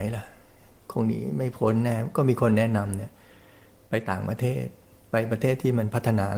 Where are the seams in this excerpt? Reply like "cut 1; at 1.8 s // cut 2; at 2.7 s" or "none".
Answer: none

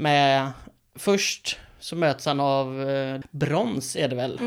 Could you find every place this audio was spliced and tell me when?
cut 1; at 3.2 s

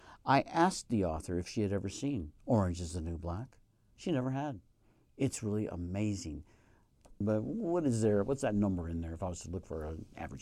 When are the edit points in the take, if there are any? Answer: cut 1; at 7.2 s

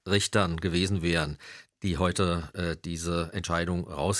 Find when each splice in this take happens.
none

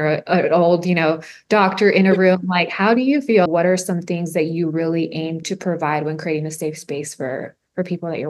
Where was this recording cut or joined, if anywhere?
cut 1; at 3.5 s // cut 2; at 5.4 s

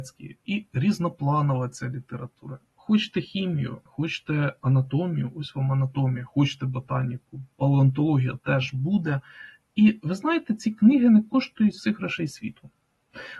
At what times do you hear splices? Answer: cut 1; at 3.9 s // cut 2; at 7.5 s

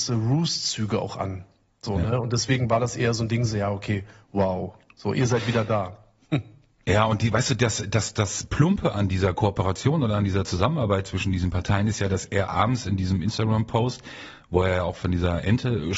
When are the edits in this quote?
none

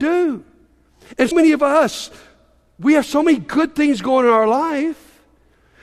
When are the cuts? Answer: cut 1; at 1.3 s

